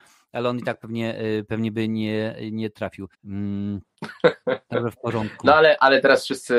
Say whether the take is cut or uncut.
cut